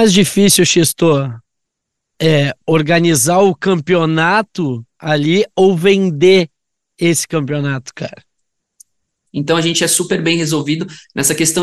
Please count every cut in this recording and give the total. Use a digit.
1